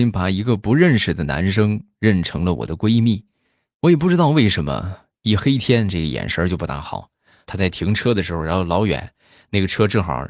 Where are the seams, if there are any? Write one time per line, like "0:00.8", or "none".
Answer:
0:07.5